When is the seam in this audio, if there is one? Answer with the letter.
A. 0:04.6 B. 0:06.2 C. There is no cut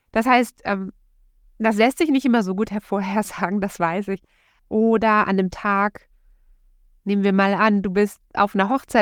A